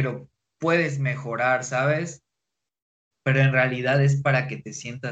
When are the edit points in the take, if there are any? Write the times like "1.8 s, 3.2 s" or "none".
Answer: 3.1 s